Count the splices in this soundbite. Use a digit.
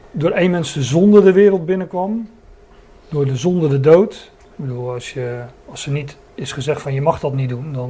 1